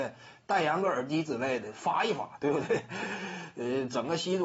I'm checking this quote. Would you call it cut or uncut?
uncut